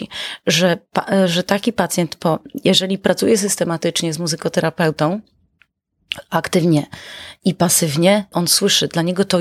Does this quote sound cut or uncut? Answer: cut